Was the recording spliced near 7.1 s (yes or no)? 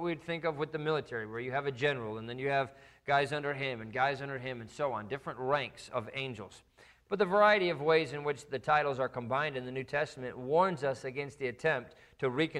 yes